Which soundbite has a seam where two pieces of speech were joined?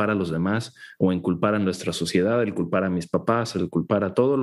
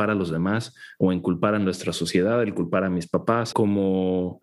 second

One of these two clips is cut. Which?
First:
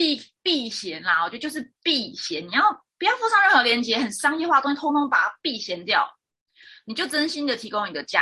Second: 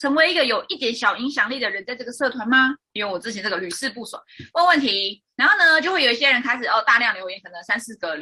second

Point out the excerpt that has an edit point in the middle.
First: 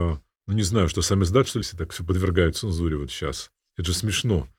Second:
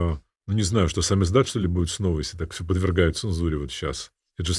first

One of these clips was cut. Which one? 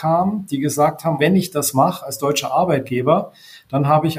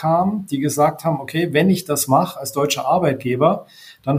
first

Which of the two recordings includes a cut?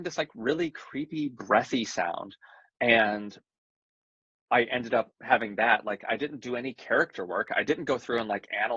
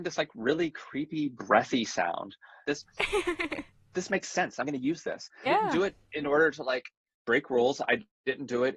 second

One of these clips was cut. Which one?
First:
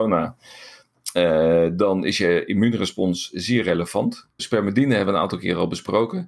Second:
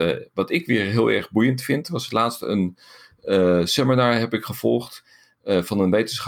first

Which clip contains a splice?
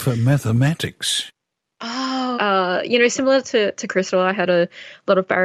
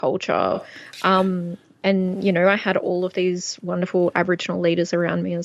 first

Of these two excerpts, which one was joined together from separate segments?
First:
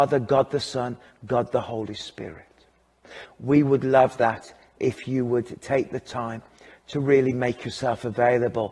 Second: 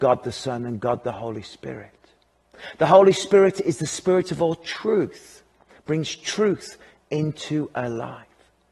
first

